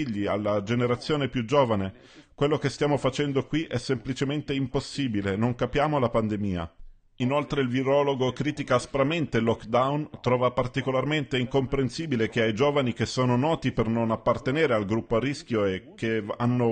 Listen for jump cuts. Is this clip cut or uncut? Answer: uncut